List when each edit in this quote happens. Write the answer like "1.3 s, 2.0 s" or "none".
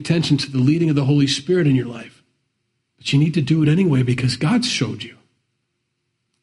2.8 s

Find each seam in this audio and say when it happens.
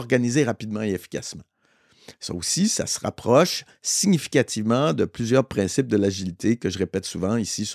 none

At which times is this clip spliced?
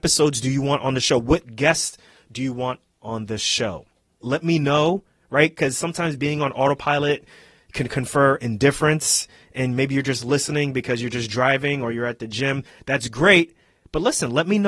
4.2 s

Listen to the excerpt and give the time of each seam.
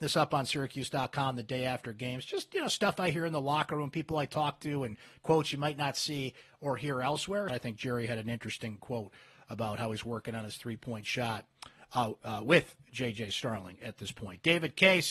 7.5 s

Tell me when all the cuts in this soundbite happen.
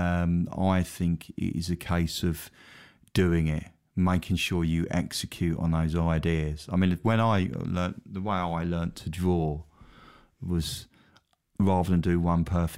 none

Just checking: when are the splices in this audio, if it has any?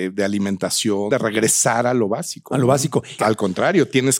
1.1 s, 3.2 s

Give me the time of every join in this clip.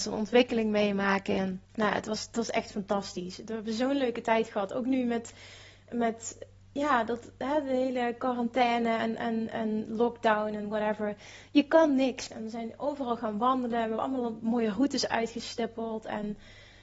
1.6 s, 12.3 s

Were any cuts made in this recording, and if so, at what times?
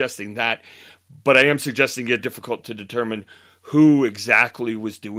2.2 s

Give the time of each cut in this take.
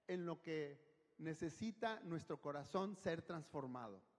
none

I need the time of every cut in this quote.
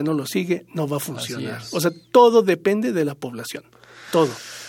none

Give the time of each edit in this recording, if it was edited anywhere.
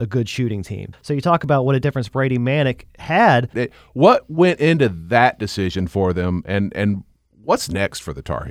0.9 s, 3.5 s

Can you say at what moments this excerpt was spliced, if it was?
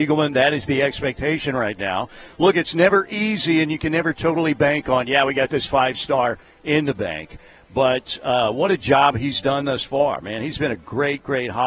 none

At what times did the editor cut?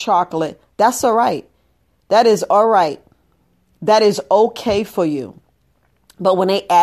none

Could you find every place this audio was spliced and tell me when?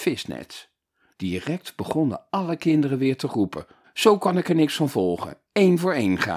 1.1 s, 3.8 s

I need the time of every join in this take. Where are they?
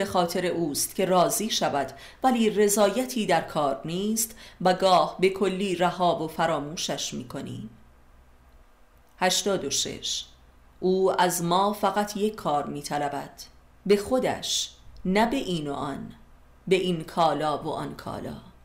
13.8 s

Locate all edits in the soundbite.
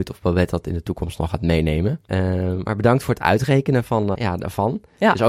2.1 s, 4.1 s

